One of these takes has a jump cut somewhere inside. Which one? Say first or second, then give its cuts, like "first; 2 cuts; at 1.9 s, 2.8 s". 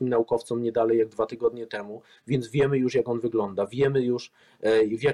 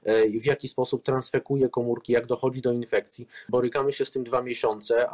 second; 1 cut; at 3.5 s